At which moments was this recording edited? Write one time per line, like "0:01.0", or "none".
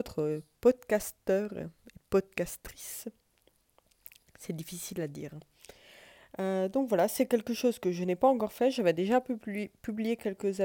none

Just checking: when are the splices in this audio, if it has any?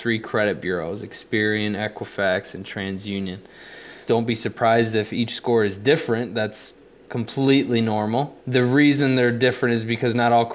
0:04.1
0:08.4

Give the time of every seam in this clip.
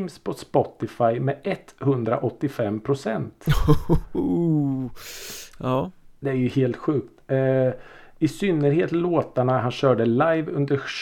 none

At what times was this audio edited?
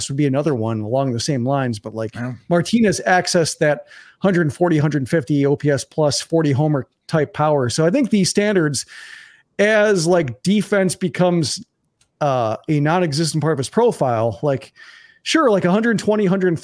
none

